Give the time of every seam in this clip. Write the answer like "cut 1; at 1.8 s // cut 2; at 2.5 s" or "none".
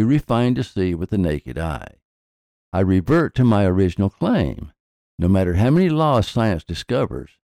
cut 1; at 5.1 s